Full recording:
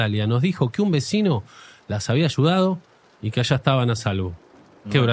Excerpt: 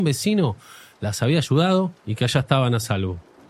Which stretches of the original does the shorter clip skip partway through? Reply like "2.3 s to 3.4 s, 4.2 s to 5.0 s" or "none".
2.9 s to 3.1 s